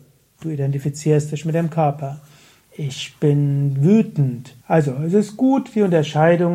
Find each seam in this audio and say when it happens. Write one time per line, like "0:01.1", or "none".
0:02.6
0:04.6